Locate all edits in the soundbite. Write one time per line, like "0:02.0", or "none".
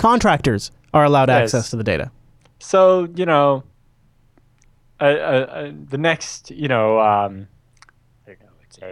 none

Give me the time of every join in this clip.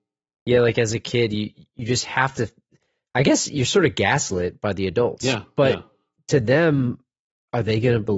none

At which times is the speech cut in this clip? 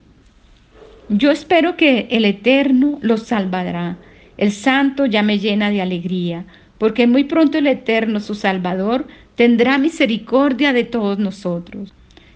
none

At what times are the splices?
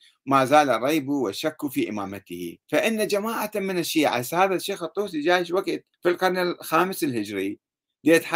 0:02.6
0:05.9

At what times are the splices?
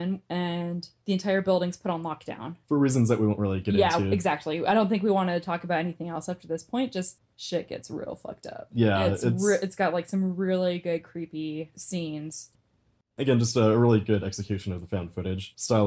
none

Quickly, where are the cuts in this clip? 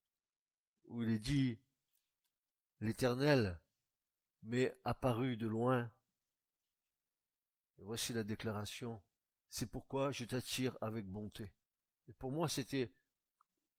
0:09.3
0:12.0

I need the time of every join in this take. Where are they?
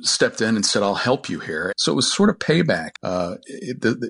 0:01.7
0:03.0

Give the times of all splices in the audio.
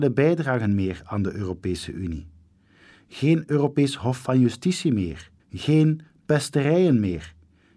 0:05.4

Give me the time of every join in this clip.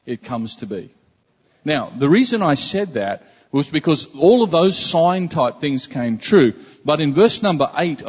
none

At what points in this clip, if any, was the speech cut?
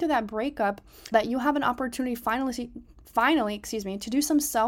0:01.1

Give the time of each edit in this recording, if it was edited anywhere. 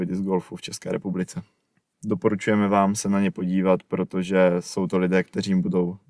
0:01.8

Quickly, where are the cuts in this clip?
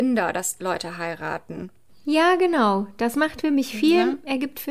none

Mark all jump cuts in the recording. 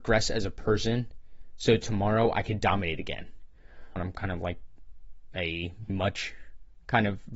0:04.0
0:05.9

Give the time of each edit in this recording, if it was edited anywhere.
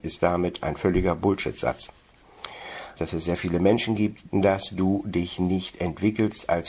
0:03.0
0:04.3

